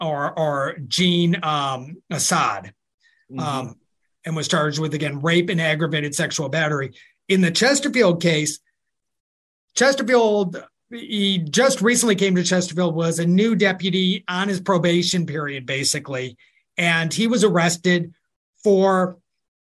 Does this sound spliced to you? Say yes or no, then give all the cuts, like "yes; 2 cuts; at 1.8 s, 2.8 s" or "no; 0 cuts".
no; 0 cuts